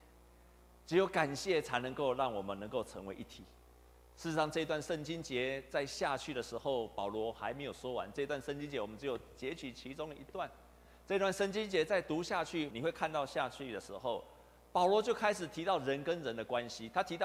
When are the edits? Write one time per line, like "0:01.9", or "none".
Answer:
0:12.7